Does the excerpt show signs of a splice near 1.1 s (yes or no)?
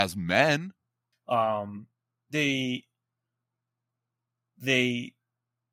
yes